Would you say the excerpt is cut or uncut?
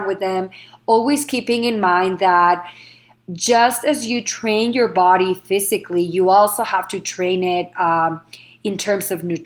uncut